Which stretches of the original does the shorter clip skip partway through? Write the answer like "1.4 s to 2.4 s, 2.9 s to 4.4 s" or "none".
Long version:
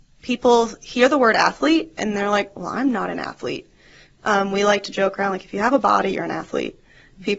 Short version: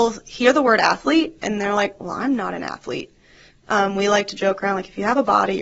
none